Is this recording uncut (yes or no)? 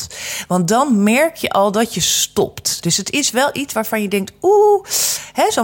no